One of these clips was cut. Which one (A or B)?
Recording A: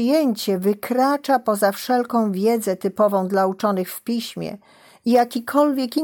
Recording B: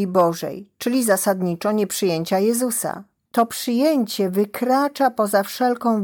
B